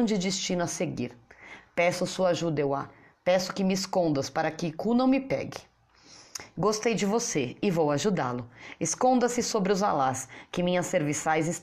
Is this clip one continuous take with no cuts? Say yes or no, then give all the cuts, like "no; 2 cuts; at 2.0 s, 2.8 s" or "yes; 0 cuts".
yes; 0 cuts